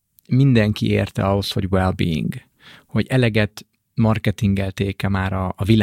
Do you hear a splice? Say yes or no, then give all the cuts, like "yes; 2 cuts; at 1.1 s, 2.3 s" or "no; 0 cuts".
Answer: no; 0 cuts